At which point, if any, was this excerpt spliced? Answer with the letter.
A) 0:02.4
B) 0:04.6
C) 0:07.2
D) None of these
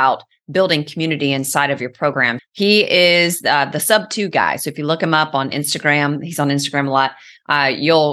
A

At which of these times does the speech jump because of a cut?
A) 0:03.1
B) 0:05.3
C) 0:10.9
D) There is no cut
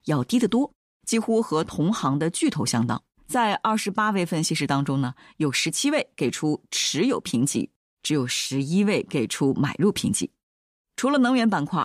A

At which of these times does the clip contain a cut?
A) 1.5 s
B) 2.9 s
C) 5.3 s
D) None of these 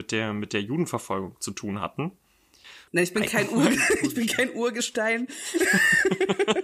B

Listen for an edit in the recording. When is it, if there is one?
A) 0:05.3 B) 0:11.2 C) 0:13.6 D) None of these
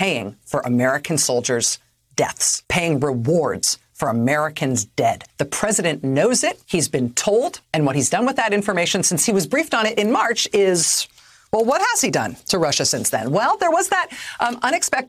D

